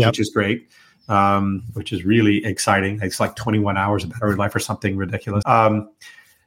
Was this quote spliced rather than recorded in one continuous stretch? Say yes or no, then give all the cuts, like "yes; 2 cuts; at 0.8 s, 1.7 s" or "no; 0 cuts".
yes; 1 cut; at 5.4 s